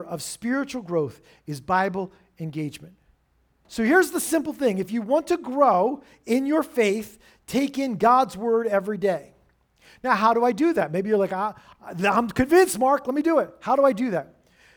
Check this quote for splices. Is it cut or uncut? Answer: cut